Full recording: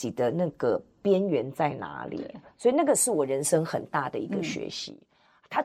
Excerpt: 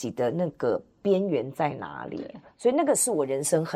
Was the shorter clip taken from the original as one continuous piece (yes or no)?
yes